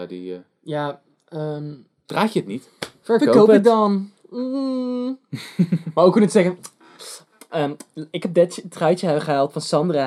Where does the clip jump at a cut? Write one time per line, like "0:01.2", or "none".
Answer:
none